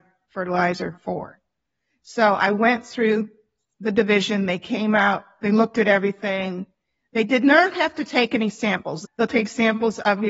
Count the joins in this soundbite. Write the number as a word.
one